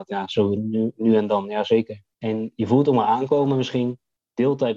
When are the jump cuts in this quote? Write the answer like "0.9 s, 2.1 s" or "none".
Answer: 2.1 s